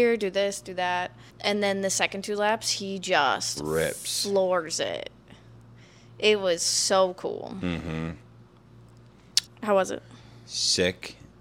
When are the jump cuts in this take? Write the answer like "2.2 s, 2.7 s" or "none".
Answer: 1.3 s, 9.5 s